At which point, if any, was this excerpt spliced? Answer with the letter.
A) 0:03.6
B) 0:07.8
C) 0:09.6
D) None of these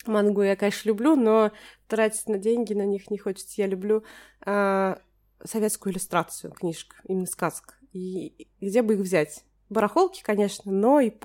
D